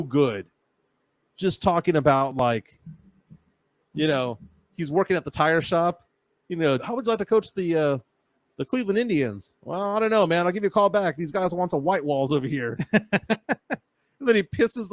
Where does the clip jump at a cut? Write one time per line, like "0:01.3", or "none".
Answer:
0:06.8